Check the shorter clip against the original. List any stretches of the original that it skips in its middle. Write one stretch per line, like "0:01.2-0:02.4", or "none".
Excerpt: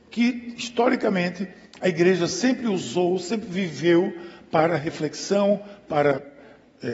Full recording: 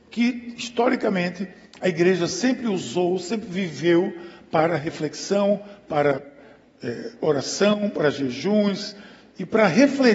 none